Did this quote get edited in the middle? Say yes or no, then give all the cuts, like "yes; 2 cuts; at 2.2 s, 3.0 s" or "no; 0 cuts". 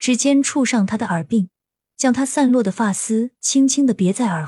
no; 0 cuts